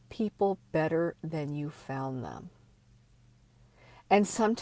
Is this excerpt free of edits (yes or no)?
yes